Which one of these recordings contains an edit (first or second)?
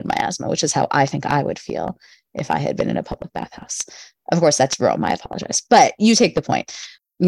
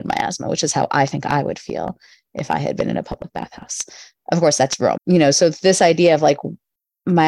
second